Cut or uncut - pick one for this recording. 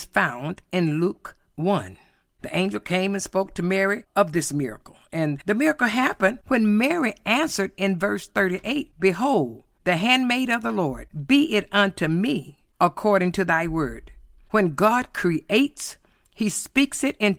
uncut